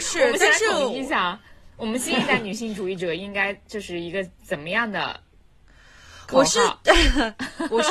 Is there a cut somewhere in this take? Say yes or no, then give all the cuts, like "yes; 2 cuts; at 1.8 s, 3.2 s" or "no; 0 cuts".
no; 0 cuts